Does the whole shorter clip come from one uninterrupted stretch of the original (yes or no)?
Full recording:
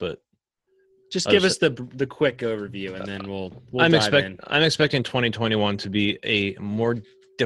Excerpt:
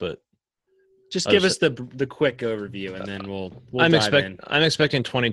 yes